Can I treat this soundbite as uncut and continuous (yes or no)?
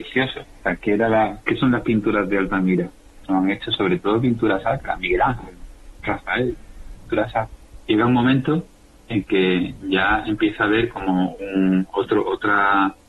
no